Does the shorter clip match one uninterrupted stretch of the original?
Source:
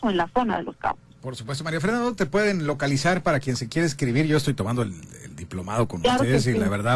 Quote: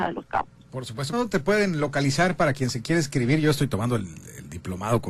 no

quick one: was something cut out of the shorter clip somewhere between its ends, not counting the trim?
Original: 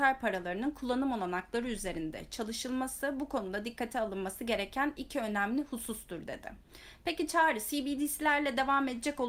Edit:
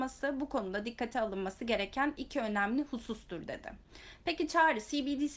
no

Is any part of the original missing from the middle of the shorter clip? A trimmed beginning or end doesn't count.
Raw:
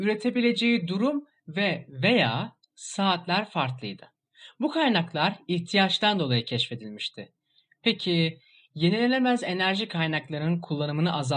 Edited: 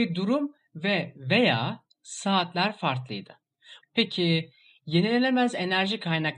yes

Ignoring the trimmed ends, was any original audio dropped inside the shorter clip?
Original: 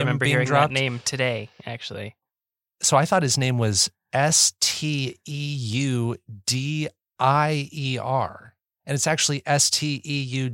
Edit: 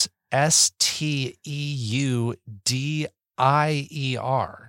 no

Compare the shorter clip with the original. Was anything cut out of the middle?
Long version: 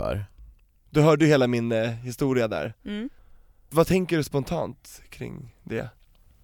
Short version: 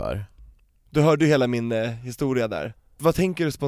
yes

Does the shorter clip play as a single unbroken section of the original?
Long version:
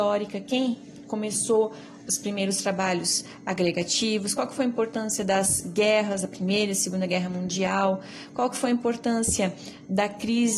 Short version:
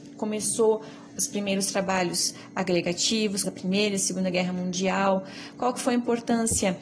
no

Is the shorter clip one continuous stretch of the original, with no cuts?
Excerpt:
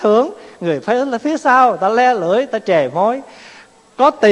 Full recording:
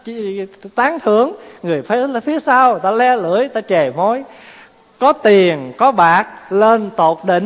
yes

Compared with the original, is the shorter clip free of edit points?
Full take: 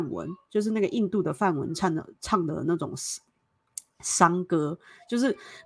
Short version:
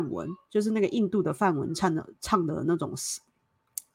yes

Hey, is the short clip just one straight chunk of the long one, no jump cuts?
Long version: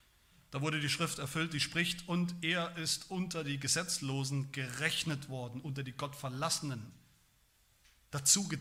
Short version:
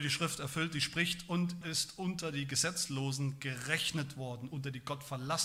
no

